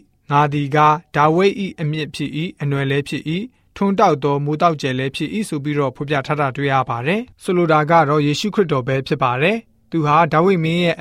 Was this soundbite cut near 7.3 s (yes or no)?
yes